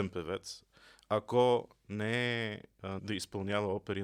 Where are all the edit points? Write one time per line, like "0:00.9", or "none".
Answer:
0:03.0